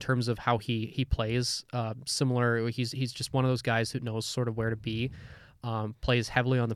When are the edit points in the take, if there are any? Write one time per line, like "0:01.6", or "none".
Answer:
none